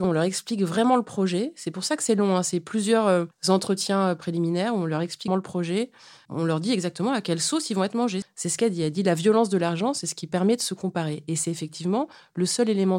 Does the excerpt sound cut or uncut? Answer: cut